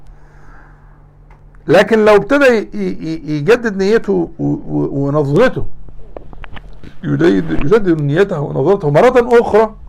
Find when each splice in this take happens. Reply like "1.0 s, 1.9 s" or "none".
none